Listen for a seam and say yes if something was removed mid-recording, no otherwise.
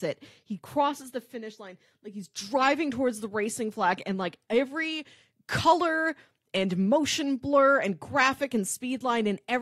no